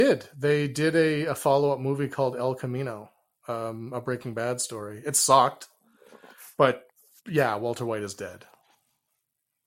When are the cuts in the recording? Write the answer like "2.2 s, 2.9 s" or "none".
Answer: none